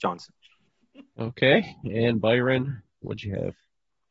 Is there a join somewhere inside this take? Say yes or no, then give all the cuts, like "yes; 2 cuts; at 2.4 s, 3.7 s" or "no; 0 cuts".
no; 0 cuts